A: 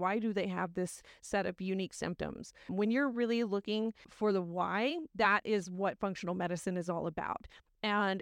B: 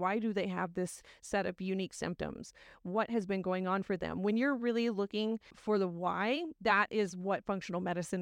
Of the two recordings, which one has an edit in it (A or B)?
A